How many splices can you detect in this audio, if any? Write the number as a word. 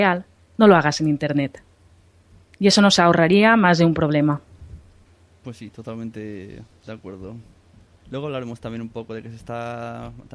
zero